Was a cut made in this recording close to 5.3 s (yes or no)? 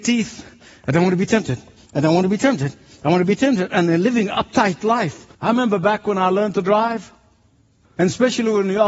yes